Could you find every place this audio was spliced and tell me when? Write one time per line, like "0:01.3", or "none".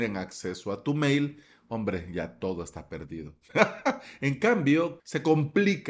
0:05.0